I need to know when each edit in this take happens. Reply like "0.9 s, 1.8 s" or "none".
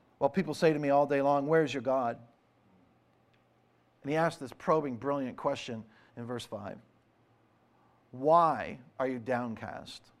4.0 s, 8.9 s

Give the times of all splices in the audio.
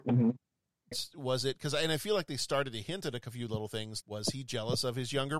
0.9 s, 4.0 s

